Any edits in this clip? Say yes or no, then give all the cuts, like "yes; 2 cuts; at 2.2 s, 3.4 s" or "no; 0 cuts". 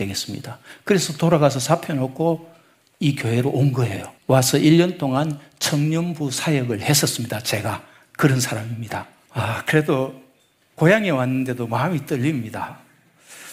yes; 2 cuts; at 4.2 s, 9.3 s